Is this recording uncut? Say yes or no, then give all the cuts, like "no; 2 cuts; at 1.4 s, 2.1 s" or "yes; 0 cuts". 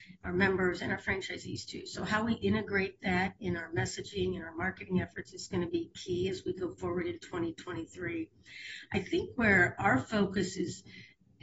yes; 0 cuts